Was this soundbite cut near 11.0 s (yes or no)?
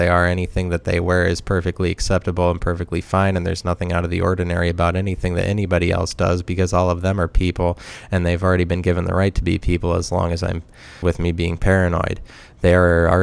yes